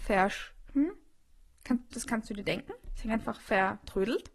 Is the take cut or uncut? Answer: uncut